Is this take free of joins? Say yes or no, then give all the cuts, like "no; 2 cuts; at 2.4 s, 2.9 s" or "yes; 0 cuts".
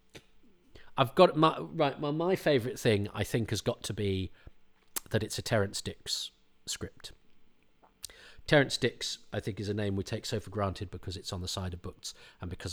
yes; 0 cuts